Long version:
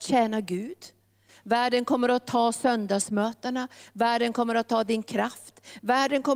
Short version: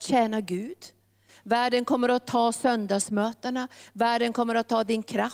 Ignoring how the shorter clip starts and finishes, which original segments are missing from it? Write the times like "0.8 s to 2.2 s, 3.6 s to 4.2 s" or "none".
none